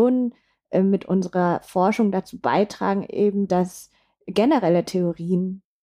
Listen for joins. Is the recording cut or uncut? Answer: uncut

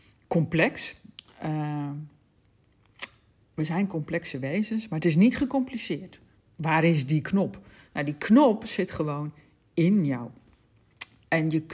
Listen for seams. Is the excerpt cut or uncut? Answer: cut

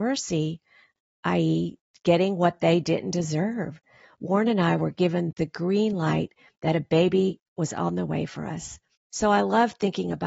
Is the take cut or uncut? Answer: cut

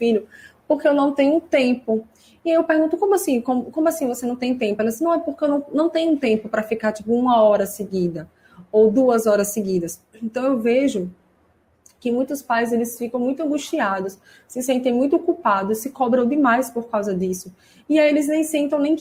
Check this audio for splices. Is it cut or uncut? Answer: uncut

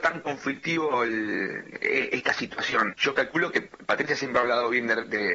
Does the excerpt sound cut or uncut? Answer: cut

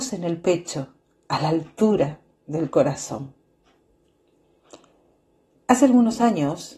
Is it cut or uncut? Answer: cut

